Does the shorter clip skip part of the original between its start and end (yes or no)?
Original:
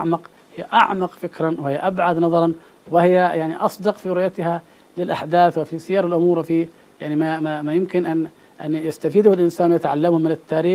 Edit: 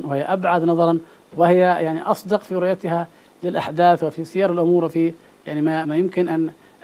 yes